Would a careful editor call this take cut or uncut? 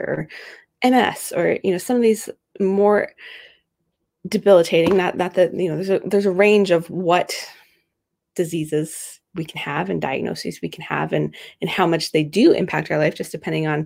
uncut